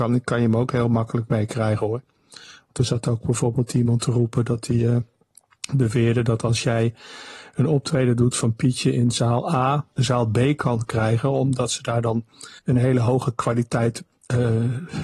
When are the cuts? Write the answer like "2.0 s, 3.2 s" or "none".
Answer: 9.9 s, 12.6 s